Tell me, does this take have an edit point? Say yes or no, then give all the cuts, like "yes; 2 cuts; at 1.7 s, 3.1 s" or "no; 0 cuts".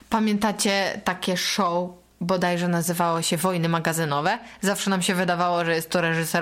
no; 0 cuts